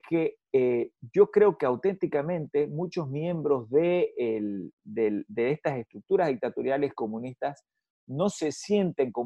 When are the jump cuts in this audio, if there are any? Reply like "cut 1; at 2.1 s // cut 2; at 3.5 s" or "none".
none